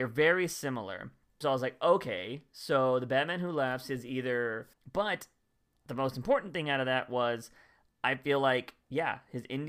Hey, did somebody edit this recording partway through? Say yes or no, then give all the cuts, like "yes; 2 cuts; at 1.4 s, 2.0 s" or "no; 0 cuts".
yes; 2 cuts; at 1.4 s, 4.7 s